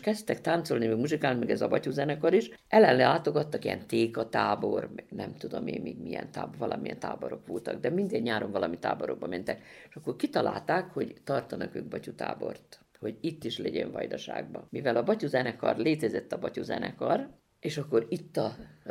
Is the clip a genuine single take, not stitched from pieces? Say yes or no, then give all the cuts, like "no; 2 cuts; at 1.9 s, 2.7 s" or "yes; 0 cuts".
yes; 0 cuts